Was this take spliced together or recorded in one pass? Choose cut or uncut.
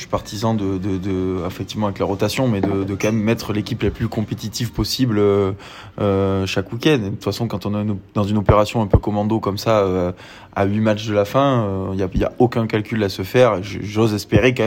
uncut